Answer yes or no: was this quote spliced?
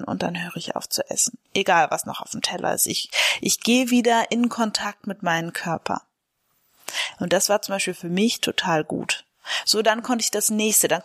no